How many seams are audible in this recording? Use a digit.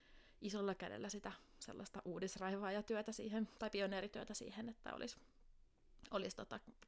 0